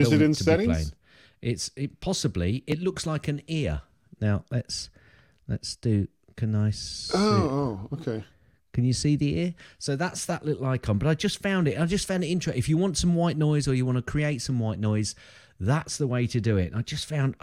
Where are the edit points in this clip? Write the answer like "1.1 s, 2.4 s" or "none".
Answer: none